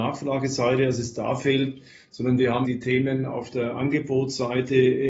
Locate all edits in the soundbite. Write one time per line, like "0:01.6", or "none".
0:02.6

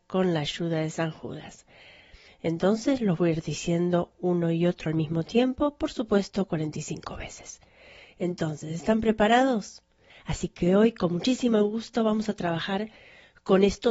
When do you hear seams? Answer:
0:02.3
0:10.1

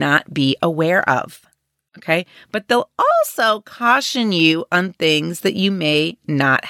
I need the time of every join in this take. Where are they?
0:01.9

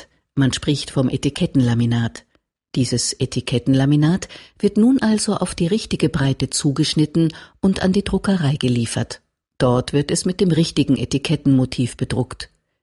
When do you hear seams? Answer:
none

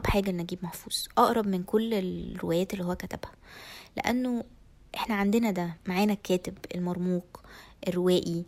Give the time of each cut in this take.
0:05.8

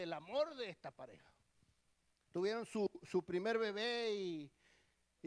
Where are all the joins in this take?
0:02.3

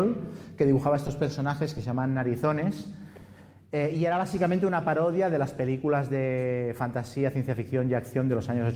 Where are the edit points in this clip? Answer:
none

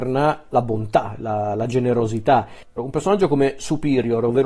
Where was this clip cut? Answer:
0:02.8

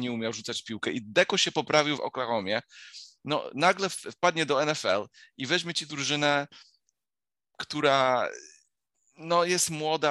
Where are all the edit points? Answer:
0:02.0

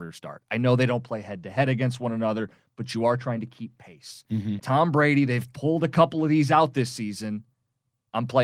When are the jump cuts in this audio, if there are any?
0:04.6

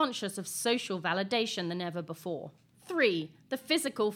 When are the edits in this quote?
none

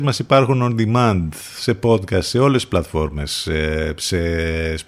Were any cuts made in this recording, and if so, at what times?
none

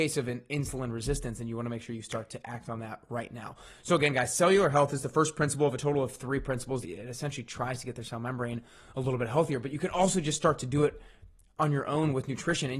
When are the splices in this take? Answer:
0:06.8

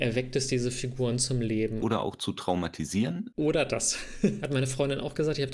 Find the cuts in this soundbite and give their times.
0:01.8
0:04.4

